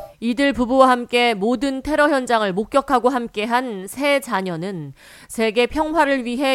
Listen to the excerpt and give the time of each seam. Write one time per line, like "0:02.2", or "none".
none